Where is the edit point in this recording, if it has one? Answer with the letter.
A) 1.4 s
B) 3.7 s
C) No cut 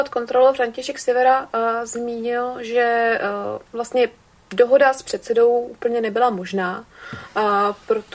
B